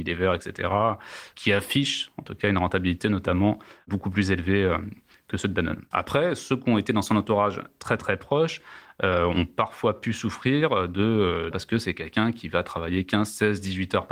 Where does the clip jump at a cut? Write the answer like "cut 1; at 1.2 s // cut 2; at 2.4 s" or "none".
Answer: cut 1; at 5.9 s // cut 2; at 11.5 s